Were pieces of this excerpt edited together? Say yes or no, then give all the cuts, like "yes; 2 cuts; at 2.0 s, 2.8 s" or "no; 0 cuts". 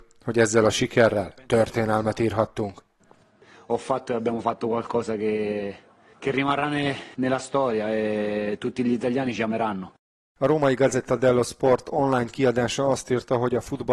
no; 0 cuts